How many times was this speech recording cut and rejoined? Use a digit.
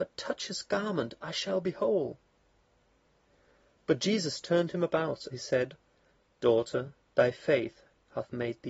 2